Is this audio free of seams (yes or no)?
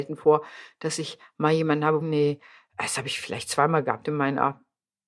no